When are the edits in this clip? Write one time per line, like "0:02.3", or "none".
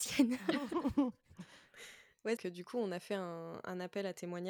0:02.4